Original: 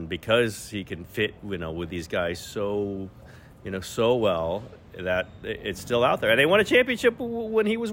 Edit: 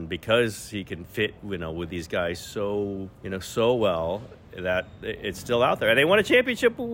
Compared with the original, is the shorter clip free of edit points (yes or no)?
no